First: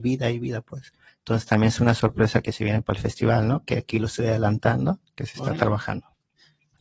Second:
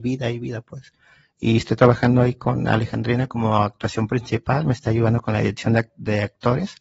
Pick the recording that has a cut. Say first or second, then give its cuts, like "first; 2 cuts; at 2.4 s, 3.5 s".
first; 1 cut; at 1.1 s